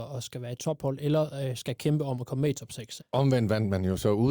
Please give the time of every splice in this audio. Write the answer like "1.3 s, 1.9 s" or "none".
3.0 s

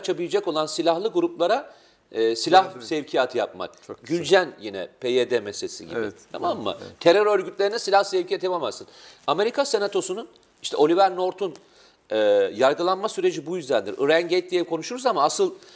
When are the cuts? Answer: none

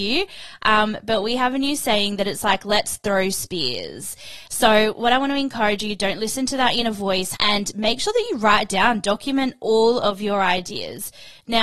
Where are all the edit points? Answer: 4.4 s, 7.3 s

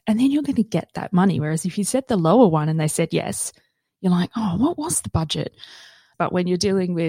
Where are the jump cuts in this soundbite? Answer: 6.1 s

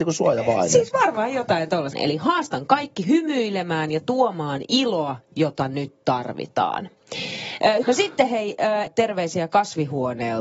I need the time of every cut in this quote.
1.9 s, 7.8 s, 8.9 s

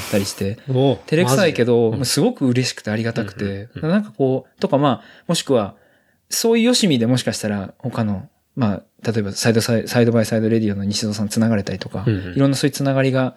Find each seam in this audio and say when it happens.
none

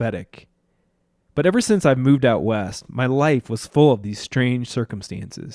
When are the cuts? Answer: none

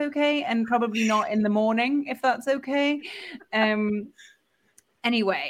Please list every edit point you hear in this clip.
none

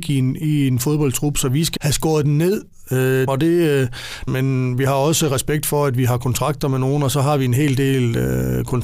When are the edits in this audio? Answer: 1.8 s, 3.3 s, 4.3 s

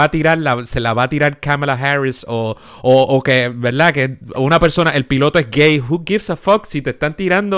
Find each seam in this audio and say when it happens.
none

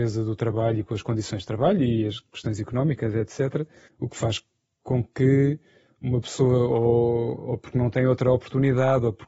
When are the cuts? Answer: 3.9 s

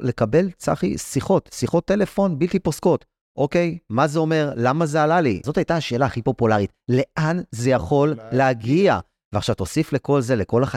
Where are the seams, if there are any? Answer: 5.4 s

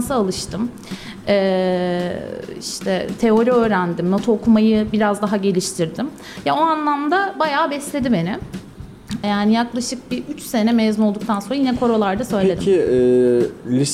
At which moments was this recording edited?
9.2 s

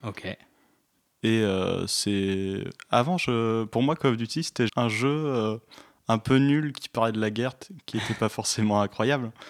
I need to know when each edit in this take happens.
4.7 s

